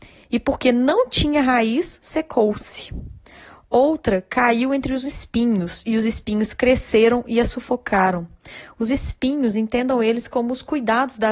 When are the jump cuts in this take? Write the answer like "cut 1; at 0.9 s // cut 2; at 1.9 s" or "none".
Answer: none